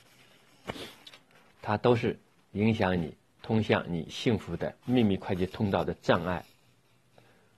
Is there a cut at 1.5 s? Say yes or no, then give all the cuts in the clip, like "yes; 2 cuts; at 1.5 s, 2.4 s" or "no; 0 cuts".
no; 1 cut; at 4.8 s